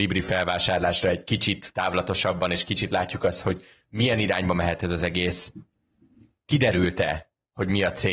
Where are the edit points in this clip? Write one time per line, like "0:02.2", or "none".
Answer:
none